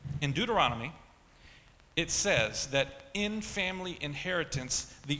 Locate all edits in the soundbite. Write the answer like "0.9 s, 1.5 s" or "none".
none